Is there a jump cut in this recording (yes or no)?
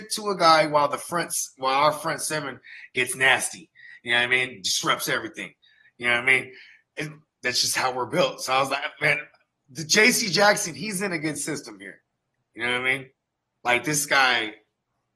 no